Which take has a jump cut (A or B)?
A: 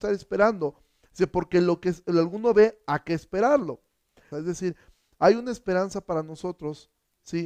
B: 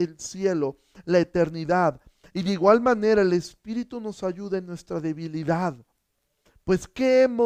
A